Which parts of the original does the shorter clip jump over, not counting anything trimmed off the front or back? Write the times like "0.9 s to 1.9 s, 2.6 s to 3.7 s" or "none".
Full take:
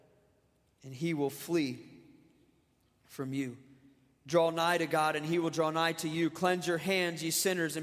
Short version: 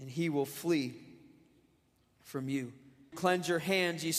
4.0 s to 6.3 s